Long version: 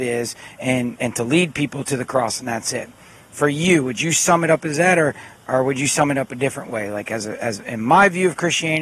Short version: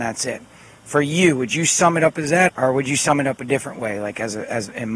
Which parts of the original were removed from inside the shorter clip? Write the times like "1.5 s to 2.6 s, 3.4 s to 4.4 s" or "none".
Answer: 5.0 s to 5.4 s